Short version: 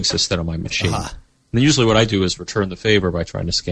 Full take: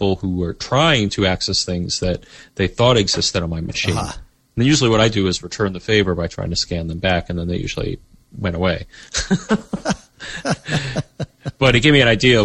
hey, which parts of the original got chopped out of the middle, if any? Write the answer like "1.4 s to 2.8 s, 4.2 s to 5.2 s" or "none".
none